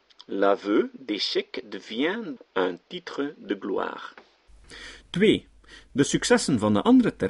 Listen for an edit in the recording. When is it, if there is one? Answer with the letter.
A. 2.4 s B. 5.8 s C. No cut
A